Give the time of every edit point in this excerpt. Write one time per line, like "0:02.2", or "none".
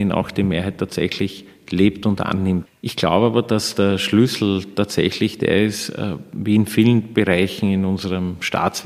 0:02.7